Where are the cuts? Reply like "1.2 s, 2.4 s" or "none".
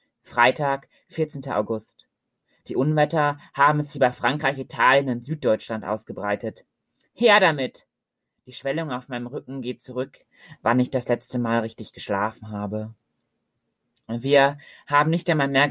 10.6 s